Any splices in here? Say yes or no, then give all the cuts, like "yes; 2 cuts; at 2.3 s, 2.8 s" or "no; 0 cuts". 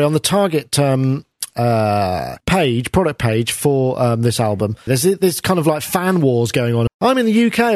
yes; 3 cuts; at 2.4 s, 4.9 s, 6.9 s